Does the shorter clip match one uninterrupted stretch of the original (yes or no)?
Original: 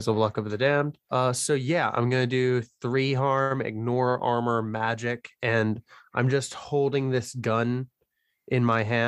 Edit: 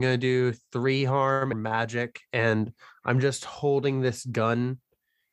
no